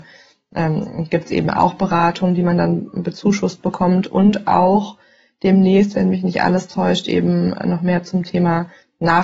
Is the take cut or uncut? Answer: uncut